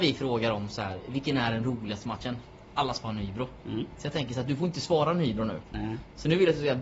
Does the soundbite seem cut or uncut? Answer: uncut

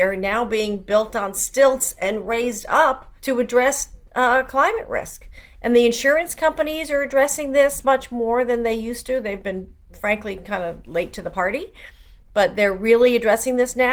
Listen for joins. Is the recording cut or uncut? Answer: cut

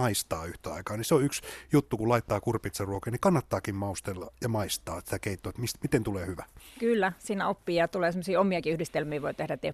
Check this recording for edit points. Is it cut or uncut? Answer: uncut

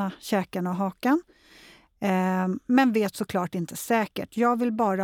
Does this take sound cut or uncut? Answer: uncut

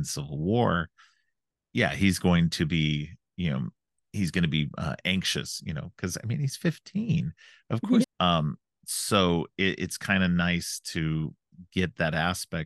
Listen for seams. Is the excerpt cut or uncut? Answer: cut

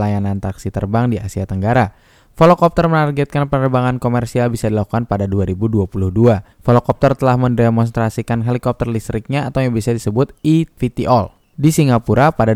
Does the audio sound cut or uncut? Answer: cut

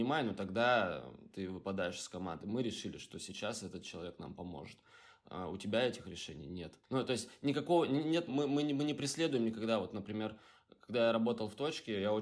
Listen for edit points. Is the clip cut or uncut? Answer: cut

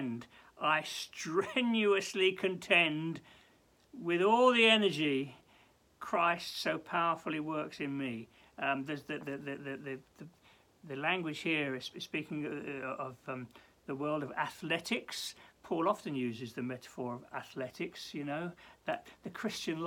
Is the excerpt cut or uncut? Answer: uncut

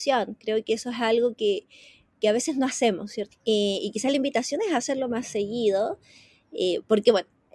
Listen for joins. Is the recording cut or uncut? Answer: cut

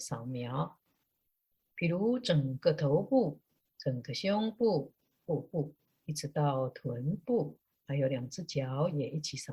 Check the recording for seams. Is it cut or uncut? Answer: cut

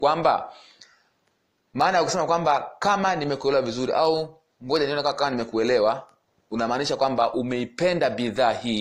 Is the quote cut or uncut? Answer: uncut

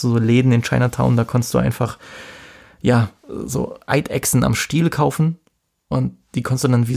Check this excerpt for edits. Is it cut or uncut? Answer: uncut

